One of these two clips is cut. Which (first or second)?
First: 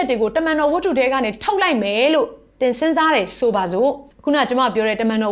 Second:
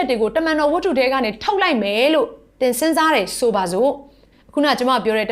first